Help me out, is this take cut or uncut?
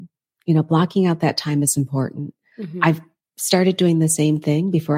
uncut